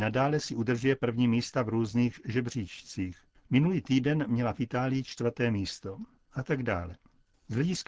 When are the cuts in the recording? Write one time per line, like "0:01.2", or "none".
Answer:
0:06.2